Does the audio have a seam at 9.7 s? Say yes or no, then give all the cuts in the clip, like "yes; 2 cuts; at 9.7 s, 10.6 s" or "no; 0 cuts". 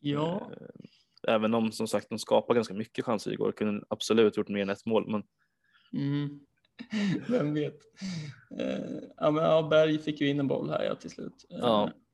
no; 1 cut; at 6.5 s